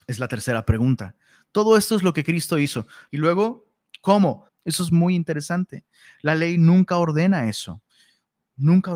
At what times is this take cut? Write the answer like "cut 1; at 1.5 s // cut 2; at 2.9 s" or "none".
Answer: cut 1; at 3.1 s // cut 2; at 4.5 s